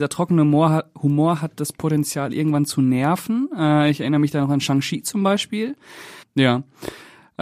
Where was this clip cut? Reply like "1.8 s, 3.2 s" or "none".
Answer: 6.2 s